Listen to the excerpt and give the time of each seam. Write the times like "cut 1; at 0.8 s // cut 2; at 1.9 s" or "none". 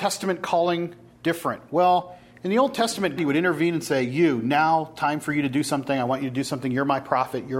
cut 1; at 3.2 s